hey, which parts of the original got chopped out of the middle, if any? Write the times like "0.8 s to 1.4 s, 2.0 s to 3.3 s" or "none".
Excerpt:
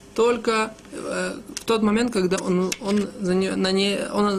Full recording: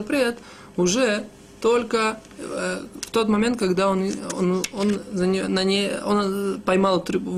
3.8 s to 4.3 s